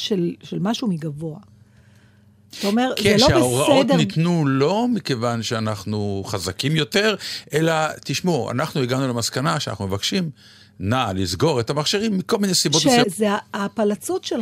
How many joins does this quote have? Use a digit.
1